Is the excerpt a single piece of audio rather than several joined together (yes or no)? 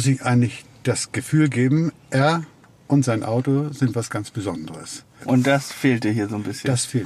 no